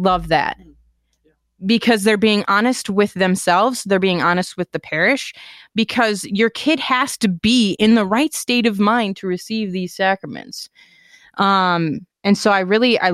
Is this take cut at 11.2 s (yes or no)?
no